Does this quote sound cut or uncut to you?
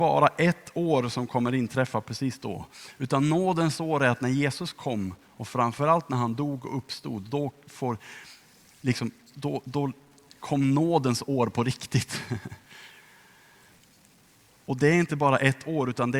uncut